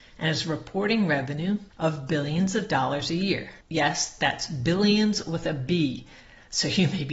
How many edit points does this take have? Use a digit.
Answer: 2